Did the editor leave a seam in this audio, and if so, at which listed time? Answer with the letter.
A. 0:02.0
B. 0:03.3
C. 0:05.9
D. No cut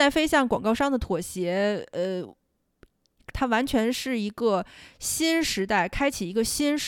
B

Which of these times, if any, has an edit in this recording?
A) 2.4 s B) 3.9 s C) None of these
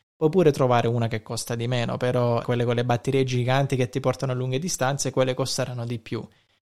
A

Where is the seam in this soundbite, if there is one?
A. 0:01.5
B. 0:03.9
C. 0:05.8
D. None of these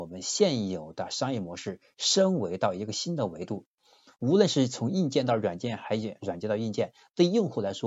D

